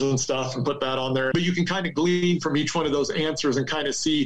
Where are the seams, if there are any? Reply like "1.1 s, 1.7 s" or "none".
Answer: 1.3 s